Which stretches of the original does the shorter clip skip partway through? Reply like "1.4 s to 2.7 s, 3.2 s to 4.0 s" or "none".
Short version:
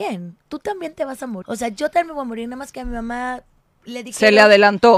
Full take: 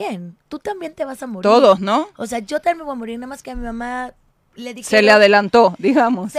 1.4 s to 2.1 s